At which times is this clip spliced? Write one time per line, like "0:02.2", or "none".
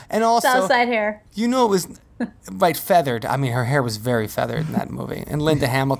none